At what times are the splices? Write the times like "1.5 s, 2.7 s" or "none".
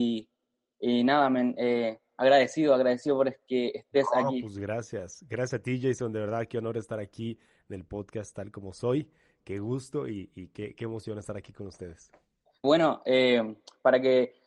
12.6 s